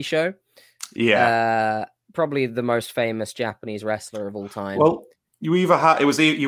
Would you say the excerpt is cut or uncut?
cut